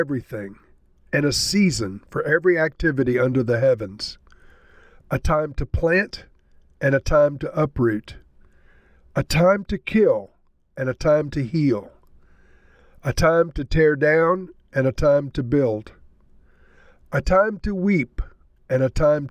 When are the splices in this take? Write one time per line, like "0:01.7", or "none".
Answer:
0:05.0